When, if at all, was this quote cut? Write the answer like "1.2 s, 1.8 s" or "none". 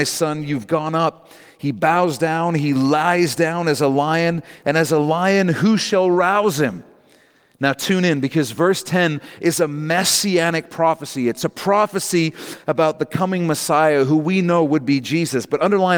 none